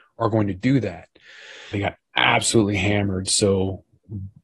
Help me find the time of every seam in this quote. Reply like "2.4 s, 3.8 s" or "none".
1.7 s